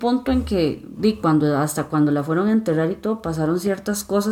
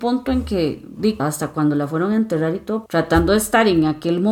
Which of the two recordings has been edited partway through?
second; 2 cuts; at 1.2 s, 2.9 s

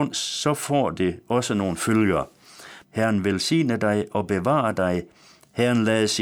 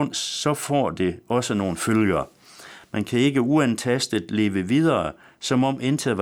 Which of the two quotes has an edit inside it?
first; 1 cut; at 2.8 s

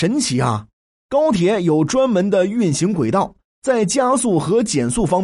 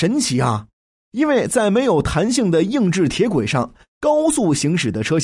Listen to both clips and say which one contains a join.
first; 1 cut; at 0.9 s

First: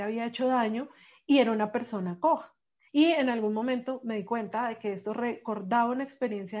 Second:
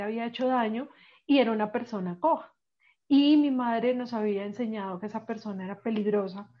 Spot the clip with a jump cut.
first; 1 cut; at 2.9 s

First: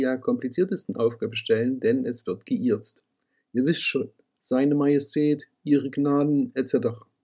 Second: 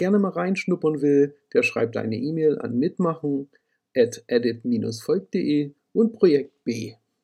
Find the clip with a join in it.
first; 1 cut; at 4.3 s

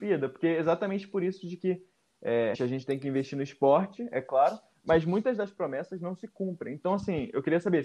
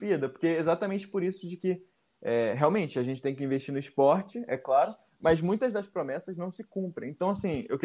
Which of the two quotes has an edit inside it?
first; 1 cut; at 2.5 s

